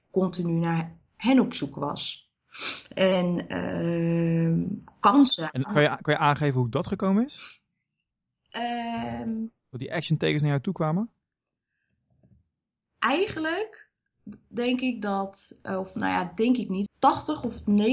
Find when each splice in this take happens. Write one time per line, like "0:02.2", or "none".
0:16.9